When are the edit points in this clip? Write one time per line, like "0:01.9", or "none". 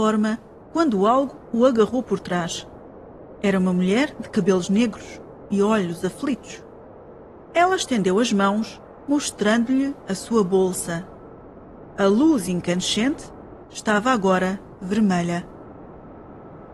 0:13.6